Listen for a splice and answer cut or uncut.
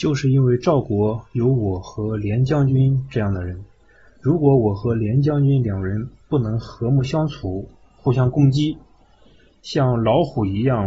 uncut